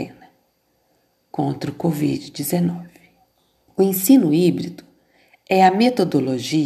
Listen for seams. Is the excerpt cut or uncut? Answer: cut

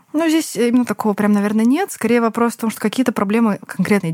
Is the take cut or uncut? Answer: uncut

